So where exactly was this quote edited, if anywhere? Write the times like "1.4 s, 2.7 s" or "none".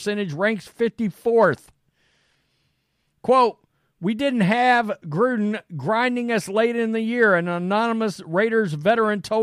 none